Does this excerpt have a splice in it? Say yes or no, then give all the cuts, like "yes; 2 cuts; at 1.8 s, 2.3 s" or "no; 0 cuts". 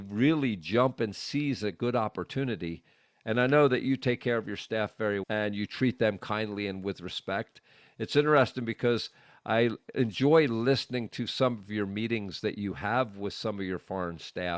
yes; 1 cut; at 5.2 s